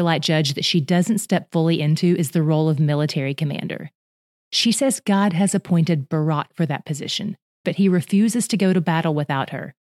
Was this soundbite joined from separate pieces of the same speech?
yes; 1 cut; at 7.6 s

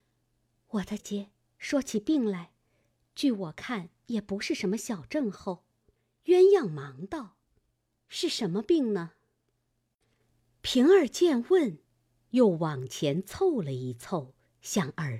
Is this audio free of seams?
no; 1 cut; at 1.0 s

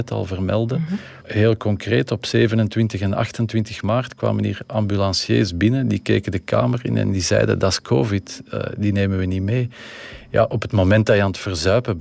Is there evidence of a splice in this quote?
yes; 1 cut; at 1.2 s

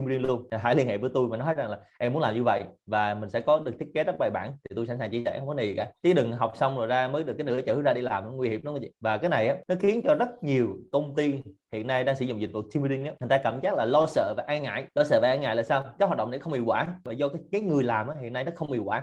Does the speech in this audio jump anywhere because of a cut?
no; 0 cuts

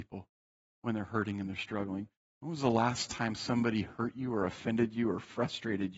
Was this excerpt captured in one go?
no; 1 cut; at 2.2 s

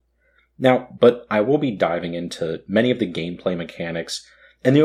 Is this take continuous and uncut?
no; 1 cut; at 1.0 s

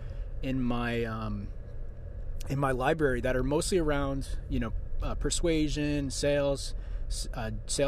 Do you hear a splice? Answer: no; 0 cuts

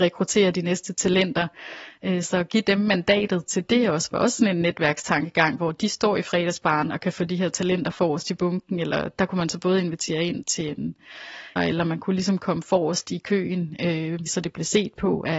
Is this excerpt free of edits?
no; 2 cuts; at 11.6 s, 14.3 s

